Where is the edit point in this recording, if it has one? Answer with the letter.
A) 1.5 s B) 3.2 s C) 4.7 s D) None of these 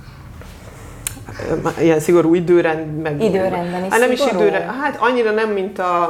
D